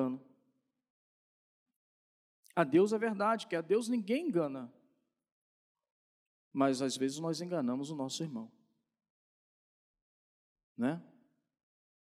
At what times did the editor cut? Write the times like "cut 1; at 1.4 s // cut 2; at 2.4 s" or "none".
none